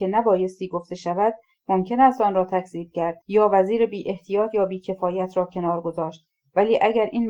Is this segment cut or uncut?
cut